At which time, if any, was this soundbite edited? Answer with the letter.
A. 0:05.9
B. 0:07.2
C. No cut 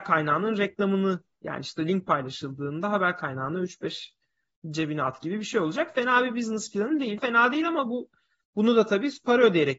B